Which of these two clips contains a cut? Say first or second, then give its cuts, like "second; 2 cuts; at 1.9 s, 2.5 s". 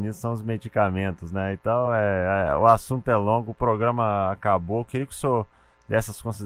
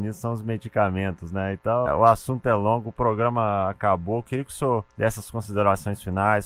second; 2 cuts; at 1.9 s, 4.9 s